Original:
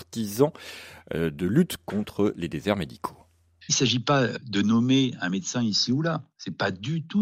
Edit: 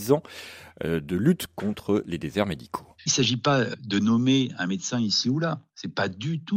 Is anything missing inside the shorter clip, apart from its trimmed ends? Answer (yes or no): yes